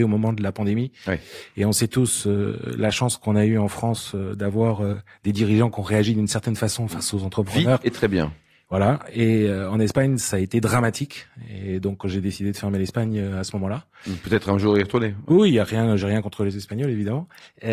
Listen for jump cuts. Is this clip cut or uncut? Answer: uncut